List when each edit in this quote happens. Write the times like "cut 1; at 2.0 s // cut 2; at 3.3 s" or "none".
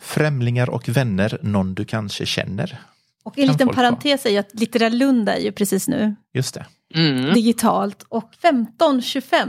cut 1; at 8.3 s